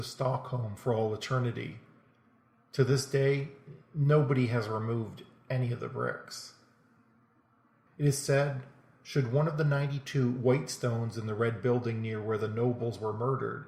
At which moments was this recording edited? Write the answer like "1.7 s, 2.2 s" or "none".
7.9 s